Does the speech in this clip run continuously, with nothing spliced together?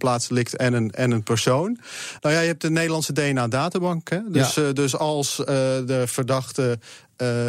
no; 1 cut; at 2.2 s

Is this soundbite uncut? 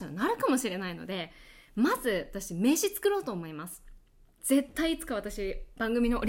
no; 1 cut; at 4.4 s

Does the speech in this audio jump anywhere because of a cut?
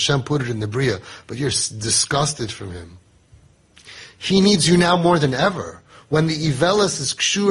no; 0 cuts

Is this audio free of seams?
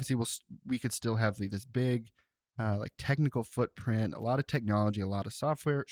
yes; 0 cuts

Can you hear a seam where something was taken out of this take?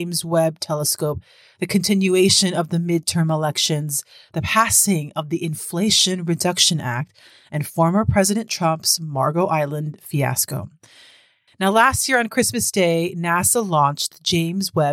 yes; 1 cut; at 11.5 s

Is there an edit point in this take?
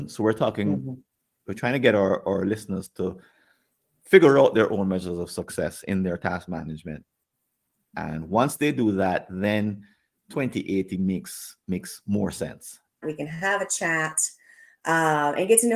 yes; 1 cut; at 13.0 s

